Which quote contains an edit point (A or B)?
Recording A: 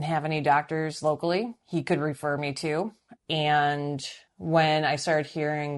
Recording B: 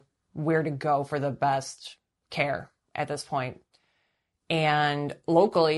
A